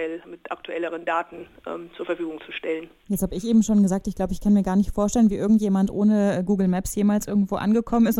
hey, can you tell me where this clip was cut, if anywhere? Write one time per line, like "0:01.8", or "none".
none